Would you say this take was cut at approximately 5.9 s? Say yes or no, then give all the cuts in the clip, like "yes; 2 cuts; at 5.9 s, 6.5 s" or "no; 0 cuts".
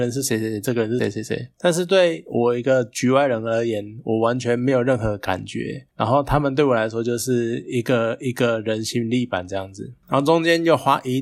no; 1 cut; at 1.0 s